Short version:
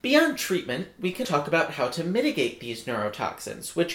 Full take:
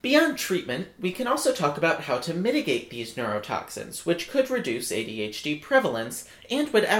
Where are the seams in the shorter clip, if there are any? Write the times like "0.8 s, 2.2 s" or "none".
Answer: 1.2 s